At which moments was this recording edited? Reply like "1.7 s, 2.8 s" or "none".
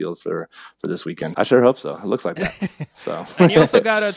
1.3 s